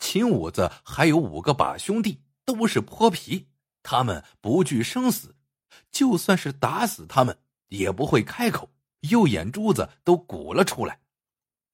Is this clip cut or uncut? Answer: cut